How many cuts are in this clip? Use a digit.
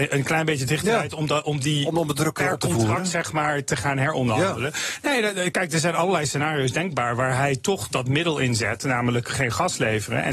0